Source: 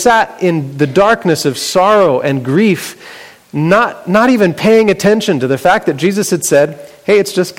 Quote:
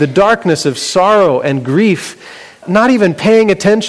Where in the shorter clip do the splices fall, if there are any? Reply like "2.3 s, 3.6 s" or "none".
2.6 s